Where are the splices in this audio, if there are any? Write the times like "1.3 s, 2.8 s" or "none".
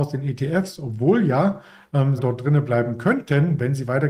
2.2 s